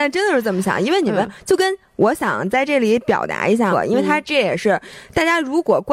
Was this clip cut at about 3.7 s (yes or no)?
yes